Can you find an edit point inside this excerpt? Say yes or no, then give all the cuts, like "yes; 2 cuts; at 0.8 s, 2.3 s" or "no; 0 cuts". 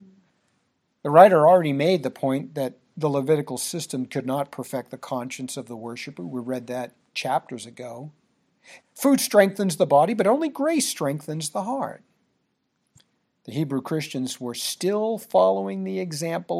yes; 1 cut; at 8.8 s